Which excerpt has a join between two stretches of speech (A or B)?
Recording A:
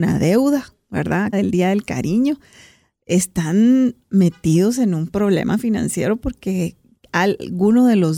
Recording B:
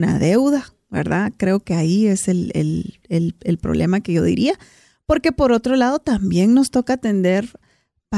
A